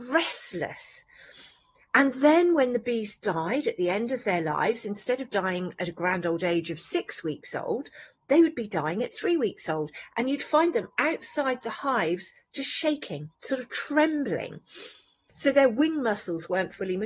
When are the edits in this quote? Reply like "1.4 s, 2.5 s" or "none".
13.4 s, 15.3 s